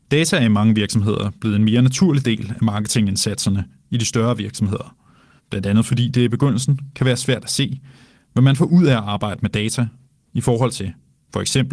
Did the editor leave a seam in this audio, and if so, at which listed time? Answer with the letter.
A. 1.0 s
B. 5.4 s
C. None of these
B